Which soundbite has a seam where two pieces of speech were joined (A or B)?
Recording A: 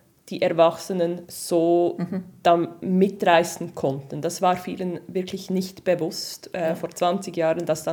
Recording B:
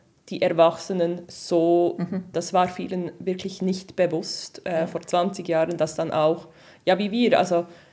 B